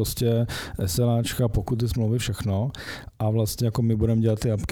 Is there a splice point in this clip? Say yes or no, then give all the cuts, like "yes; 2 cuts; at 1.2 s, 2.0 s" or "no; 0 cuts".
no; 0 cuts